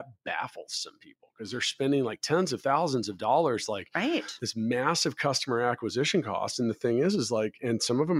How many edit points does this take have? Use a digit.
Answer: 0